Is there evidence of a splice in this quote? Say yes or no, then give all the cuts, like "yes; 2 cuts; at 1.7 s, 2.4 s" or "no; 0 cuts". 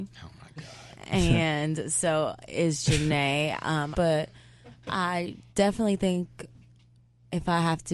yes; 2 cuts; at 3.9 s, 5.5 s